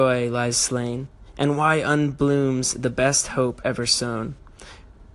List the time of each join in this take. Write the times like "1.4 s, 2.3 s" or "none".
none